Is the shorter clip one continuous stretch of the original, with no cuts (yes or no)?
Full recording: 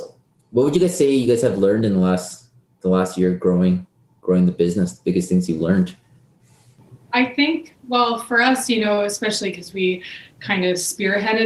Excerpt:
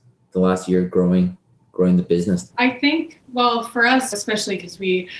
no